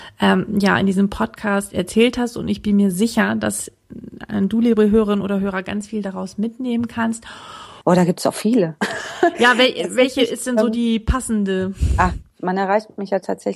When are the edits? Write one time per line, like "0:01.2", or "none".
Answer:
0:07.8